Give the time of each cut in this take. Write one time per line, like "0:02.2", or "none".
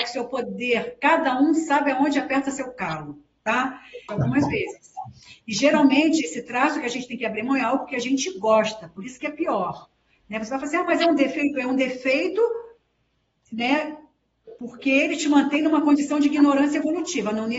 0:04.1